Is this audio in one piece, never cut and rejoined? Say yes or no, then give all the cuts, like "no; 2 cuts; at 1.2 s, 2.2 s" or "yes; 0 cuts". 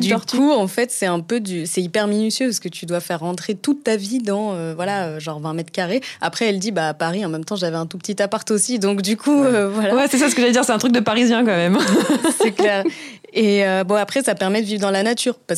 yes; 0 cuts